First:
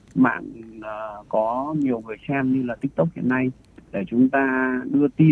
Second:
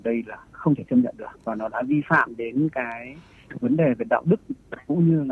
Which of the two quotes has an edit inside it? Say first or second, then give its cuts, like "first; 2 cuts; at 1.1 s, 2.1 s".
second; 1 cut; at 1.4 s